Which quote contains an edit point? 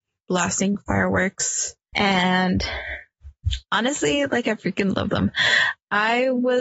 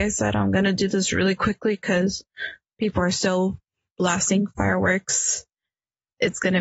first; 1 cut; at 1.9 s

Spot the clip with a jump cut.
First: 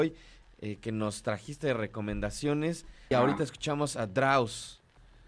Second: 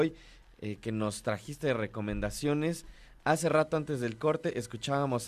first; 1 cut; at 3.1 s

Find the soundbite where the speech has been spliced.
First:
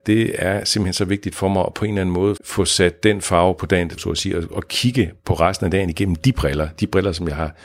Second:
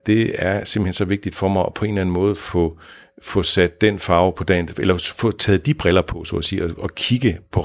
first; 2 cuts; at 2.4 s, 4.0 s

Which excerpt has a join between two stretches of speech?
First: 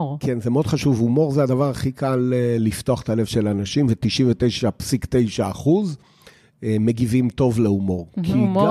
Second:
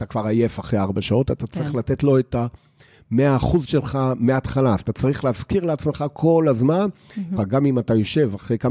second; 1 cut; at 7.4 s

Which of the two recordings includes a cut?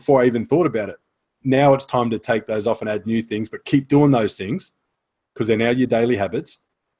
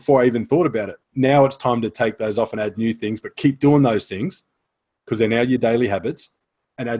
second; 1 cut; at 1.0 s

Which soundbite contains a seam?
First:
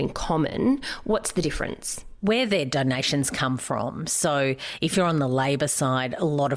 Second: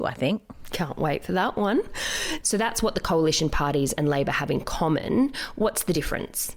second; 1 cut; at 2.4 s

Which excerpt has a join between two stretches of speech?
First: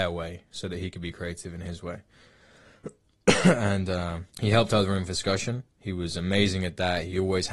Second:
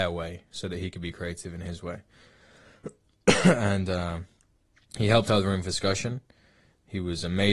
first; 2 cuts; at 4.3 s, 5.7 s

